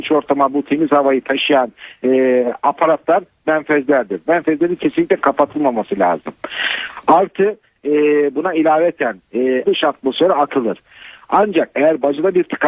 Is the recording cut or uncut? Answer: cut